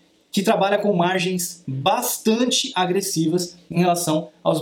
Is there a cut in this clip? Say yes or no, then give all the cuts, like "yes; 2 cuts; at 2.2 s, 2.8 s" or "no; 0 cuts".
no; 0 cuts